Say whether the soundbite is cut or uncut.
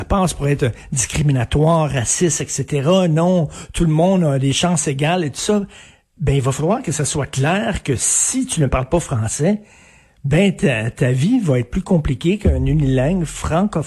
uncut